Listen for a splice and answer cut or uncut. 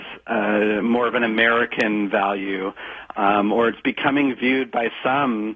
uncut